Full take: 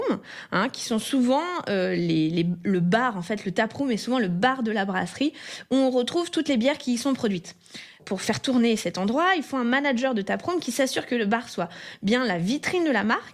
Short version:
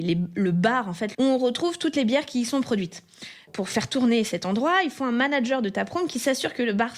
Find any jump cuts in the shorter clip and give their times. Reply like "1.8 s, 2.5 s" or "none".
1.1 s